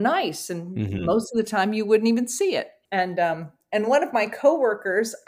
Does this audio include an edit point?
no; 0 cuts

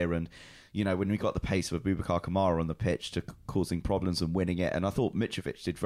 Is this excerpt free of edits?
yes; 0 cuts

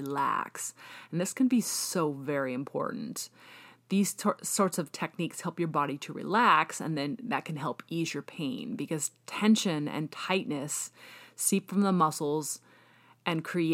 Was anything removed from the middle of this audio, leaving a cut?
no; 0 cuts

